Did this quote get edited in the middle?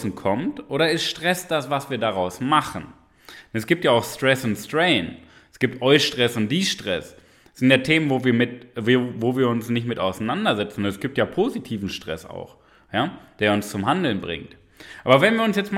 no; 0 cuts

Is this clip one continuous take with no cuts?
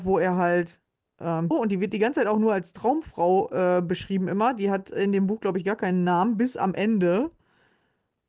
no; 1 cut; at 1.5 s

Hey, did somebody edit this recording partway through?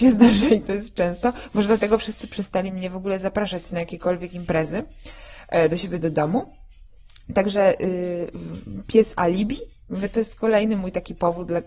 no; 0 cuts

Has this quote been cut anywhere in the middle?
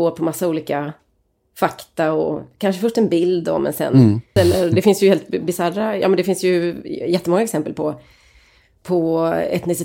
yes; 1 cut; at 4.4 s

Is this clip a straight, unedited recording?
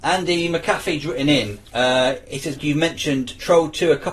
no; 1 cut; at 2.6 s

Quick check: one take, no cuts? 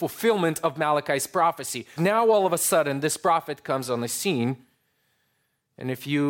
no; 1 cut; at 2.0 s

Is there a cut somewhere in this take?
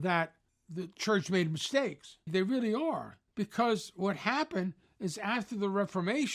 yes; 1 cut; at 2.3 s

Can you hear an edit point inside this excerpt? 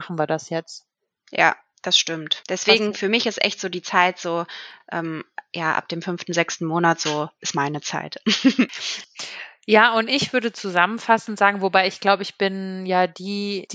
no; 0 cuts

